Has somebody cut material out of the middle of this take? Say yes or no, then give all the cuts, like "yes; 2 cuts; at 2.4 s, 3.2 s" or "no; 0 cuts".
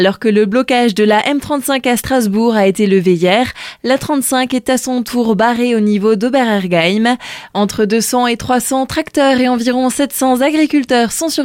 no; 0 cuts